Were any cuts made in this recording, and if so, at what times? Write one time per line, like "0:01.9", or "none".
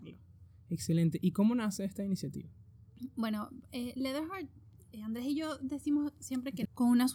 none